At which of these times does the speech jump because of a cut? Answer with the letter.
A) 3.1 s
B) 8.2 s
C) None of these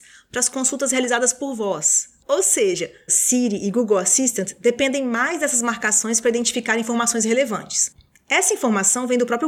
A